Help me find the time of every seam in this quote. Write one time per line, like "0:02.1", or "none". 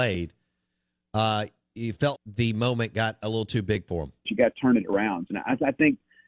0:02.1
0:04.2
0:05.3